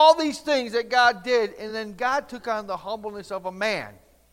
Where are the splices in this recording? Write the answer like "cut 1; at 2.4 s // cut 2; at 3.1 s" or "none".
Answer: none